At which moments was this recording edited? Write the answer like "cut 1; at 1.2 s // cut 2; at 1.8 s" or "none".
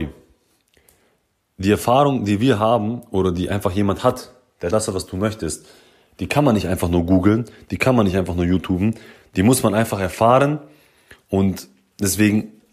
cut 1; at 4.7 s